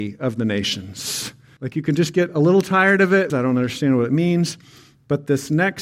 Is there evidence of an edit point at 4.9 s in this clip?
no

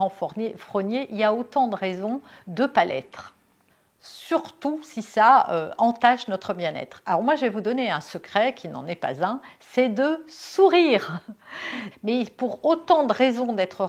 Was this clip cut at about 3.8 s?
no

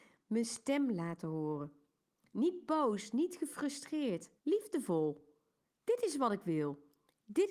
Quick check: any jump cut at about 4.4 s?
yes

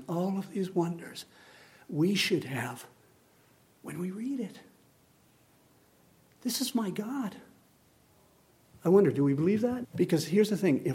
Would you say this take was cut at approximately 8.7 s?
yes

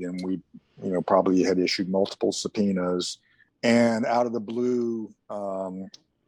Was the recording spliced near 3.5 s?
yes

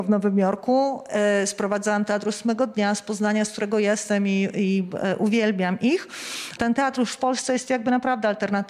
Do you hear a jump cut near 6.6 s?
yes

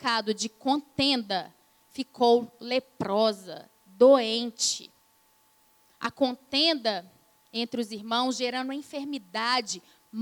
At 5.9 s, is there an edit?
yes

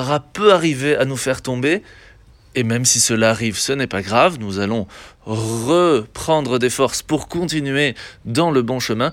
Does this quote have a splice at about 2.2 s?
no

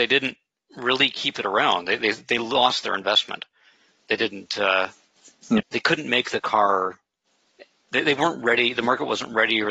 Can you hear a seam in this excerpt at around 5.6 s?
yes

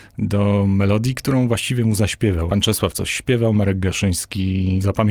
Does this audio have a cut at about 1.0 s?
no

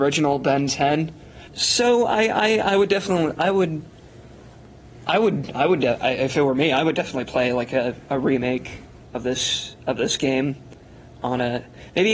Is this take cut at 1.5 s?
yes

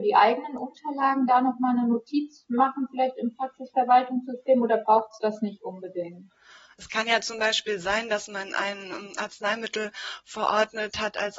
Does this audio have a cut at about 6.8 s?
yes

